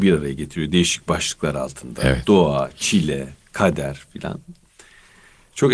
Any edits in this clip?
no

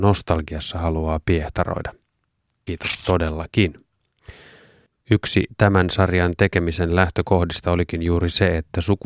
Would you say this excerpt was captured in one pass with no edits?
no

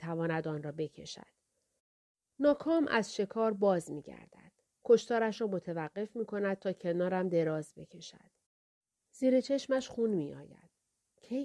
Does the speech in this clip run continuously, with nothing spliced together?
yes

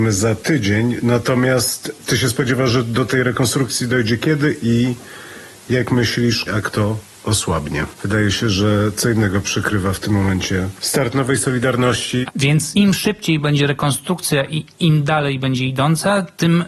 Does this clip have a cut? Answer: yes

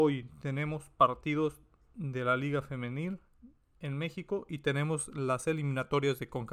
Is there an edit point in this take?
yes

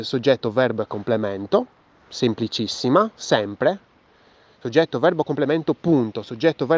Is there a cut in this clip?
no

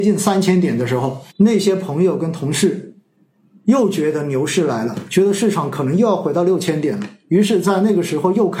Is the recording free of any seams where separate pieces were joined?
no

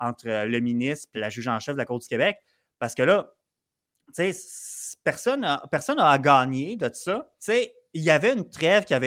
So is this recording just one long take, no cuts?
no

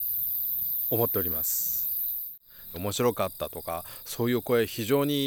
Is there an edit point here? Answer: yes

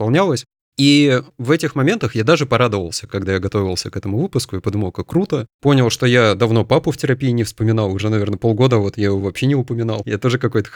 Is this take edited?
no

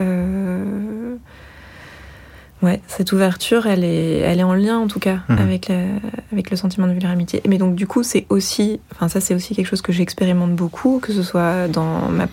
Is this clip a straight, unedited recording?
yes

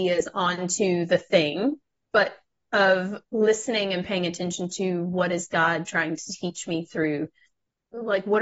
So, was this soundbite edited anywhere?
no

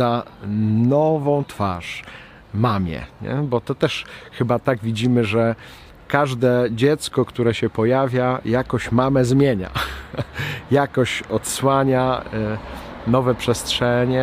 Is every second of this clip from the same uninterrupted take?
yes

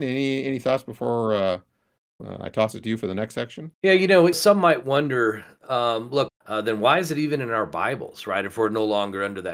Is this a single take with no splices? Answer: no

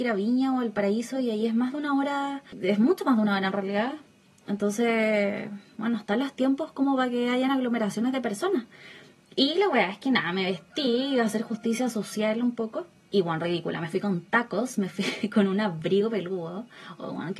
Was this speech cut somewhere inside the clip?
no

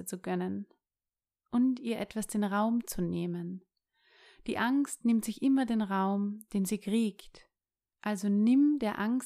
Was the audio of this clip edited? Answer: no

